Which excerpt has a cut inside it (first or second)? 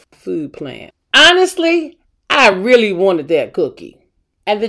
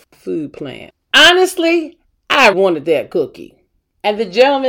second